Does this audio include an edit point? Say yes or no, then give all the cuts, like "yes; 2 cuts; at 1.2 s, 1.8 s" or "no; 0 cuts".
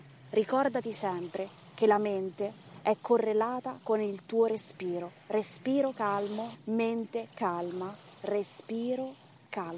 yes; 1 cut; at 6.6 s